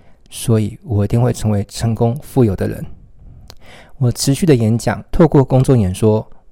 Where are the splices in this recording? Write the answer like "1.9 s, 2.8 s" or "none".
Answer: 5.1 s